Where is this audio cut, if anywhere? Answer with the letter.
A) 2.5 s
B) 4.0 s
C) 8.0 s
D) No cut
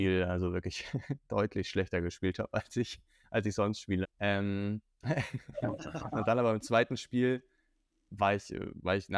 B